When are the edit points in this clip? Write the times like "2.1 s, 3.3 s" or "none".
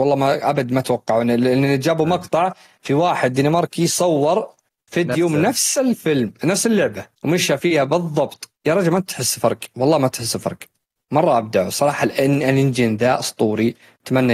7.1 s, 8.6 s